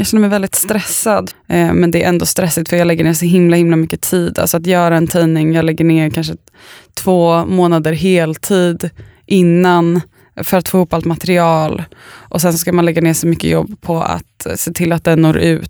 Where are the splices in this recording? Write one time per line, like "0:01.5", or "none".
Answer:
0:01.3